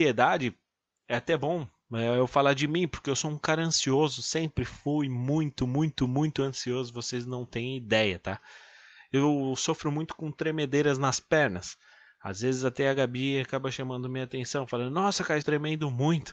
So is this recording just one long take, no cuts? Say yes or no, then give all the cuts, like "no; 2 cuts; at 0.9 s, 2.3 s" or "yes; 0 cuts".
no; 1 cut; at 15.4 s